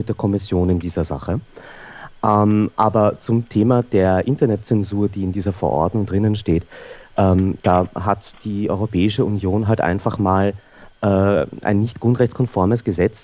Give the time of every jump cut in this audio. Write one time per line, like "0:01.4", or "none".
none